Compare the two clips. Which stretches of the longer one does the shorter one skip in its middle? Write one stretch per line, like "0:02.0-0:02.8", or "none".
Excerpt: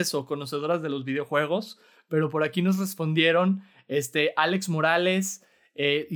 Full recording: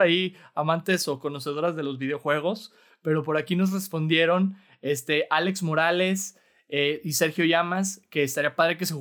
none